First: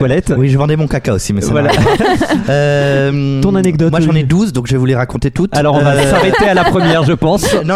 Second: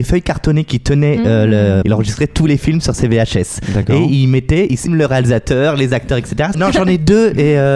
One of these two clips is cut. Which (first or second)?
second